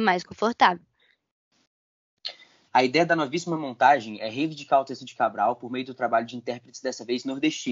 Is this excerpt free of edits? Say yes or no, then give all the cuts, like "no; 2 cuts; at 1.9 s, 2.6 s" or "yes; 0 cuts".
no; 1 cut; at 2.7 s